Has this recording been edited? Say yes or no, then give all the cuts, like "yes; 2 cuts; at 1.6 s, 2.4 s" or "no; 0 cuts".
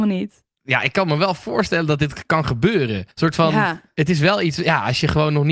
yes; 1 cut; at 3.1 s